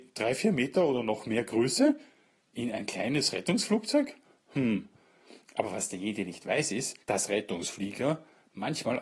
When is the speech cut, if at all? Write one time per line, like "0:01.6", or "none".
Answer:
0:07.0